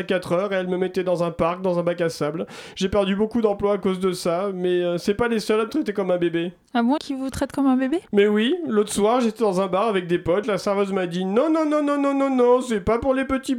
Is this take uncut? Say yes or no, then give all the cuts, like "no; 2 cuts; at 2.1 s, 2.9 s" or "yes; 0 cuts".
no; 2 cuts; at 7.0 s, 10.4 s